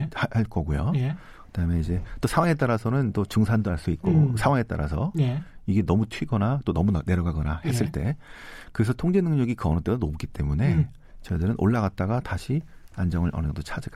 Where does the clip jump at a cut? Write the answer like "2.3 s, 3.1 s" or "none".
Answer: none